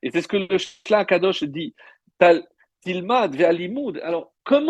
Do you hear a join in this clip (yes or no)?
no